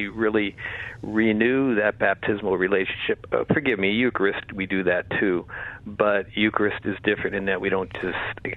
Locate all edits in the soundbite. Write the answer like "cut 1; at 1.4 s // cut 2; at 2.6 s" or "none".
none